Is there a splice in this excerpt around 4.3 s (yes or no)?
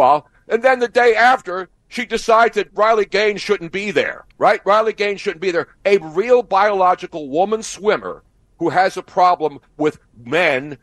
yes